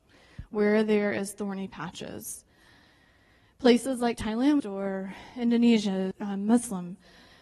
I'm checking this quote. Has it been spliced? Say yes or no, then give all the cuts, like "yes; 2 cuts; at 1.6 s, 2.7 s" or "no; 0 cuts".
yes; 2 cuts; at 4.6 s, 6.1 s